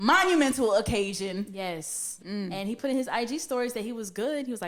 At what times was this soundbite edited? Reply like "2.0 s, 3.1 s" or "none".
2.2 s